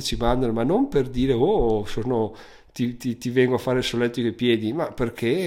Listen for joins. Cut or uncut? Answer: uncut